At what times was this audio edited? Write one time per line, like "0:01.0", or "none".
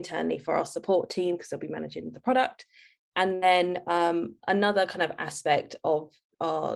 none